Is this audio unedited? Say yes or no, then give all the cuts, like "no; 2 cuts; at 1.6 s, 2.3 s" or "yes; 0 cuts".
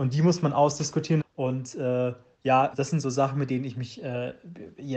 no; 2 cuts; at 1.2 s, 2.7 s